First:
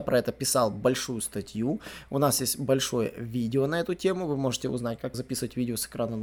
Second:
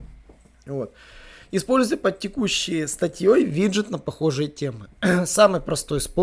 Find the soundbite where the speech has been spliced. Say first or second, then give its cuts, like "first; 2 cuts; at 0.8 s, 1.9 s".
first; 1 cut; at 5.1 s